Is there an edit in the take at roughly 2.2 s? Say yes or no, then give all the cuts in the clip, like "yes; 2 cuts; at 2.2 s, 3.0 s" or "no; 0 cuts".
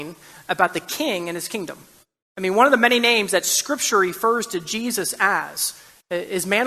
yes; 1 cut; at 2.2 s